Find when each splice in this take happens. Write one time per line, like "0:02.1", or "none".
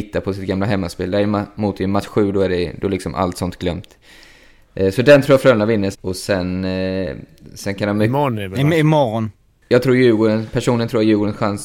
0:05.9